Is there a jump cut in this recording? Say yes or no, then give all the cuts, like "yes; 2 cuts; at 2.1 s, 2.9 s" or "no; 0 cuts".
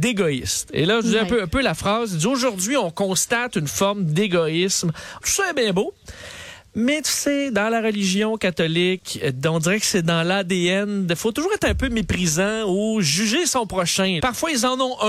yes; 2 cuts; at 5.2 s, 14.2 s